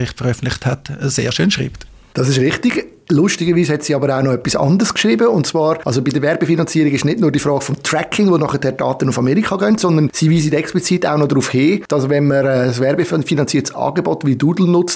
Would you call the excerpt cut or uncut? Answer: uncut